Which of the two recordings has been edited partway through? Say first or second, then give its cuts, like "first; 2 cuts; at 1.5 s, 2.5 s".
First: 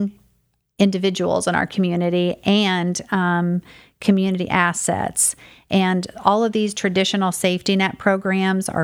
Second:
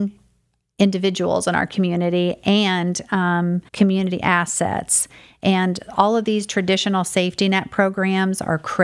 second; 1 cut; at 3.7 s